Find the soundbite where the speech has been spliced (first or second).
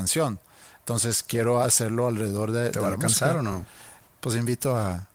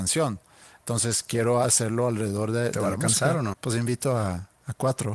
second